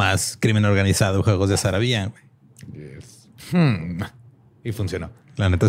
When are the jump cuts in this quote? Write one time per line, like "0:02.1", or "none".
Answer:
0:03.4